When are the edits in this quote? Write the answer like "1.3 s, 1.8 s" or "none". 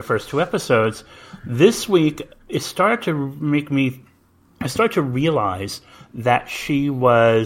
none